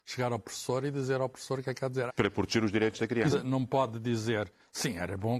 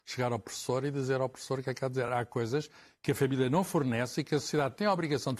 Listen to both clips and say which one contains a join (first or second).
first